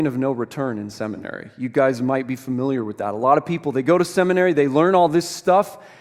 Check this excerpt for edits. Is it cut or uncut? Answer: uncut